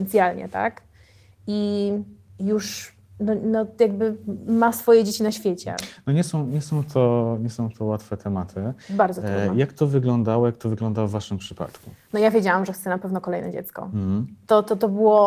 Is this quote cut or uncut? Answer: uncut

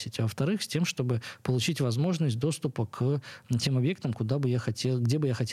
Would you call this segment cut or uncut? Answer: uncut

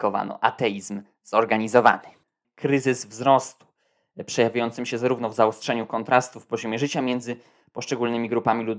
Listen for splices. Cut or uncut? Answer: cut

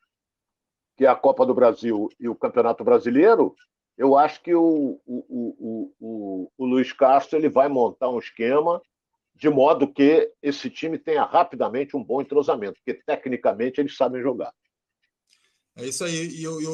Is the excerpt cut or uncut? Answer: uncut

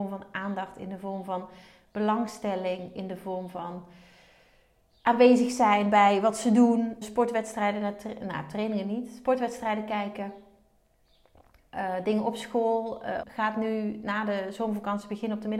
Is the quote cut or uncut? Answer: cut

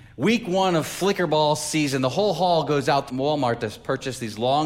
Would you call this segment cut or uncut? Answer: cut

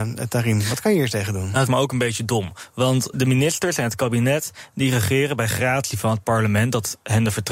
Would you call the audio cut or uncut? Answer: cut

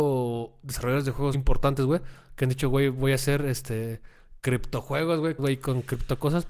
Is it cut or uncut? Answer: cut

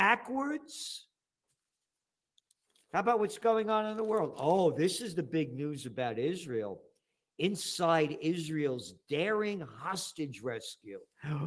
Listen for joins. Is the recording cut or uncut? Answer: uncut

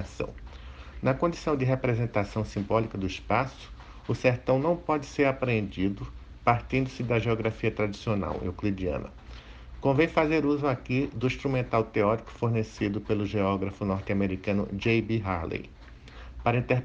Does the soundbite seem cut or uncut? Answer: uncut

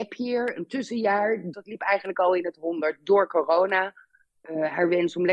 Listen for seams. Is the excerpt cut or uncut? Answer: cut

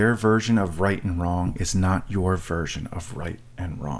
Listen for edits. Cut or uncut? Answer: uncut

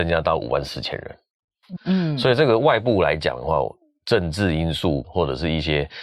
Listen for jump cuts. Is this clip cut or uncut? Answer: cut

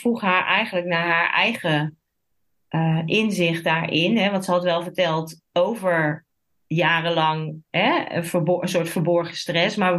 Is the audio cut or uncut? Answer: uncut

